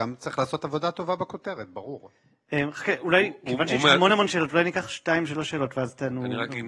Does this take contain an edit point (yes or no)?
no